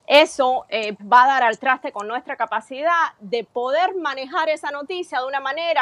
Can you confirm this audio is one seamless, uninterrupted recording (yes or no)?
no